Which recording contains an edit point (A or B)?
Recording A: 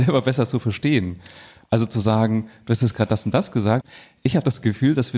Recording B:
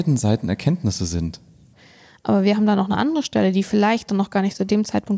B